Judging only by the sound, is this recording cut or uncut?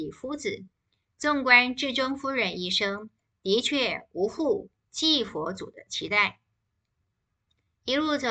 uncut